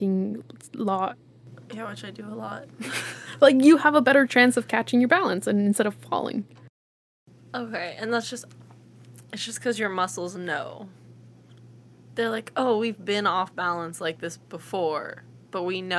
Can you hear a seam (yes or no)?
no